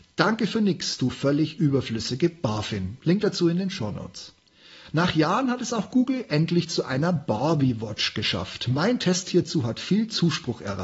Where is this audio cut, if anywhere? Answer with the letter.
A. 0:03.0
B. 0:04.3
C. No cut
C